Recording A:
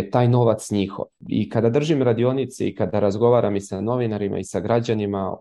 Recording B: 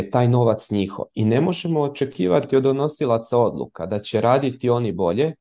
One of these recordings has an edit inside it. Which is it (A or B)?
B